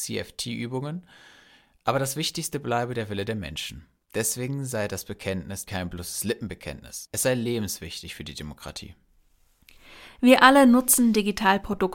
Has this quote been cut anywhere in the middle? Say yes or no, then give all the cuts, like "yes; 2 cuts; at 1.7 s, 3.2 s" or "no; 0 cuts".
yes; 1 cut; at 5.6 s